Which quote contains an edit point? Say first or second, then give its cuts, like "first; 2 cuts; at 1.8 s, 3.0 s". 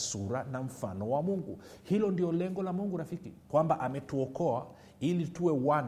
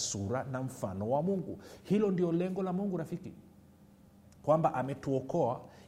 first; 1 cut; at 3.4 s